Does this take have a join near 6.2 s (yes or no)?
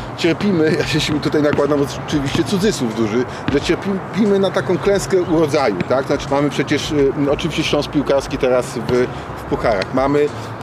yes